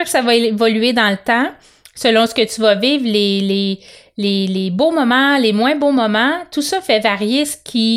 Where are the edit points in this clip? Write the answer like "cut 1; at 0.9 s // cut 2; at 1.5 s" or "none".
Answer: none